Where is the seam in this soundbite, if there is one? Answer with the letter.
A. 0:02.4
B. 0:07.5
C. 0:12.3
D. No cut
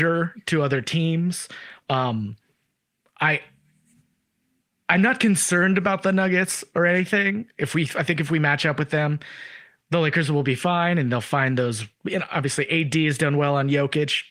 D